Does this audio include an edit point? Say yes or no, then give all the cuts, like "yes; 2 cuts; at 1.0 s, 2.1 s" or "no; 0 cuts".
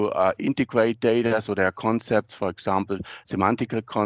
no; 0 cuts